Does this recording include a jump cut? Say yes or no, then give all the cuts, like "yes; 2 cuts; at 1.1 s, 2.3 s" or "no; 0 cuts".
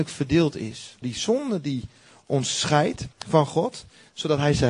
yes; 2 cuts; at 1.0 s, 3.1 s